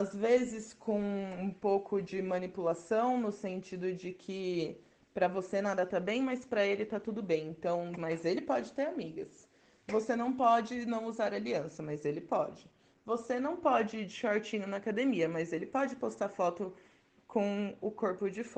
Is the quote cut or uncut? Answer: cut